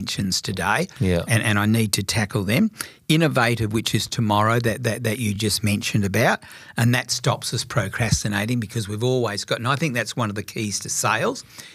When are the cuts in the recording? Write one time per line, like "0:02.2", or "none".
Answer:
none